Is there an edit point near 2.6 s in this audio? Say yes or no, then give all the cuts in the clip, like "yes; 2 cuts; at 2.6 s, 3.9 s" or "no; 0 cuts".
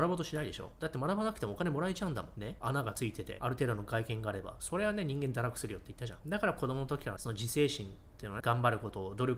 no; 2 cuts; at 6.2 s, 8.4 s